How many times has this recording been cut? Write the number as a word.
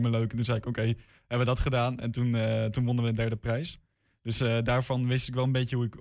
zero